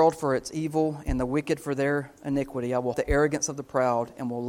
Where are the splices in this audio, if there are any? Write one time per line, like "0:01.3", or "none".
0:02.9